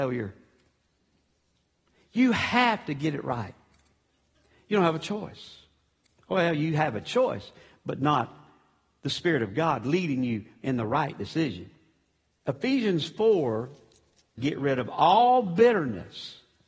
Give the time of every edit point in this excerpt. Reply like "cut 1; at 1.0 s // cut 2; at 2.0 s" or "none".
cut 1; at 12.4 s // cut 2; at 14.4 s